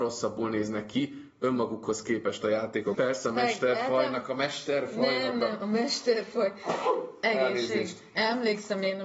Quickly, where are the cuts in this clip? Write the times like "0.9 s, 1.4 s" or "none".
2.9 s